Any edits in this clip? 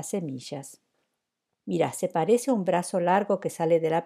yes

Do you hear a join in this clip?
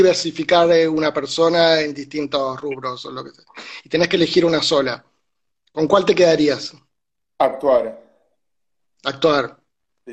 no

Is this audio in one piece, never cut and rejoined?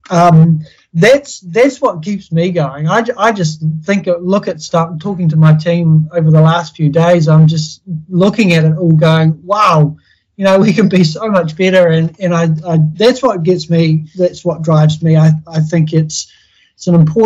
yes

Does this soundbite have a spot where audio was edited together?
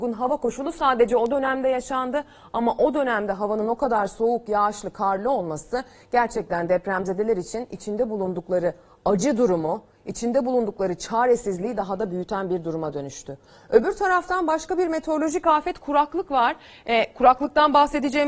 no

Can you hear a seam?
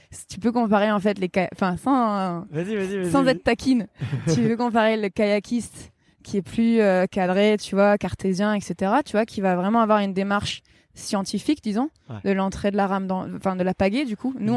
no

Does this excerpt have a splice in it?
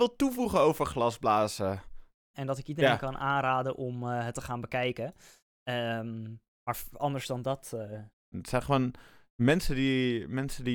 yes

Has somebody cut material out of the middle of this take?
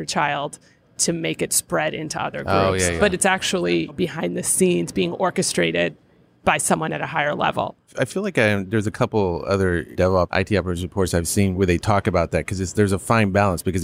no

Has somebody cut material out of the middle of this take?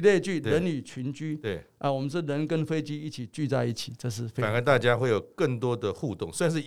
no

